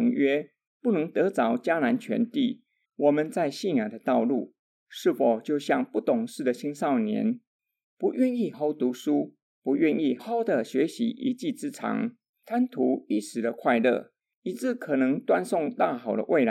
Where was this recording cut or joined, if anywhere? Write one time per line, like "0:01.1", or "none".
0:02.8
0:08.5
0:10.2